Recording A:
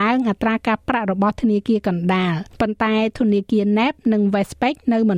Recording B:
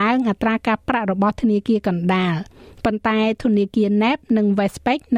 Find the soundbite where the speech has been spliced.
A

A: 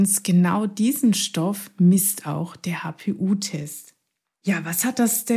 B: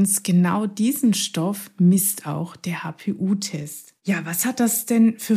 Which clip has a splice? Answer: B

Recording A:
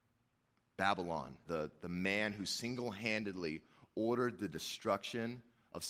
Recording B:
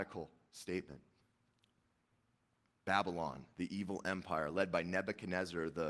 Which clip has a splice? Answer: A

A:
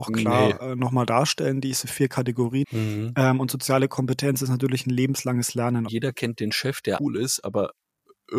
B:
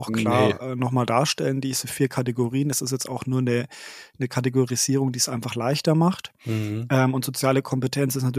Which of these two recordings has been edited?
A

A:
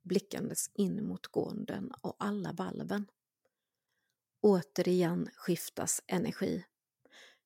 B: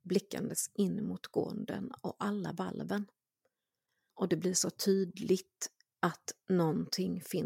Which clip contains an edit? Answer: B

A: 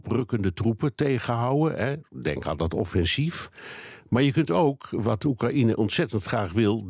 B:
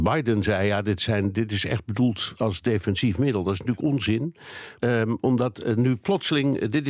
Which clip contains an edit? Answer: B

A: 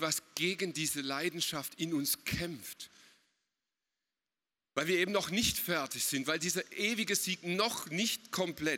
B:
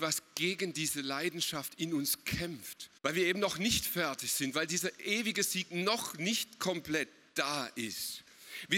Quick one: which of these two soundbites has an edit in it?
B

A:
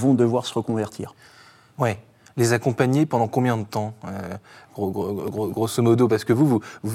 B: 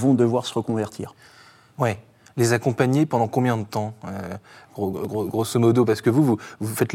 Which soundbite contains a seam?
B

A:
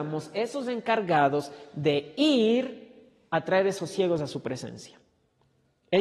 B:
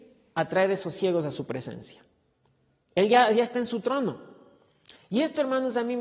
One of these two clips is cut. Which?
B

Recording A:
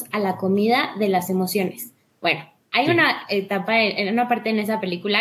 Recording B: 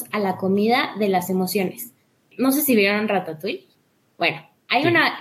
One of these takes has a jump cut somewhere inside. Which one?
A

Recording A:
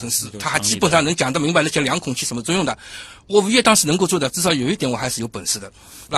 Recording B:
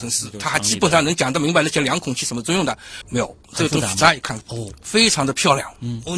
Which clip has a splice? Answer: B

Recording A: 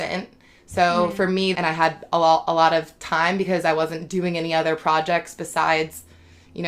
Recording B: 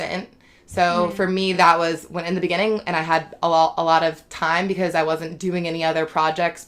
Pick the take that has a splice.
A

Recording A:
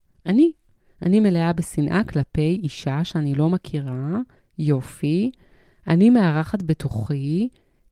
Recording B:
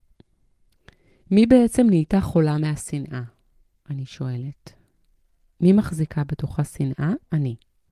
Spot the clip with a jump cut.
A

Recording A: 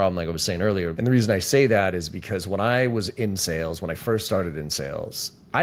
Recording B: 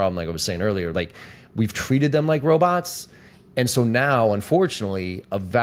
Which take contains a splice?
A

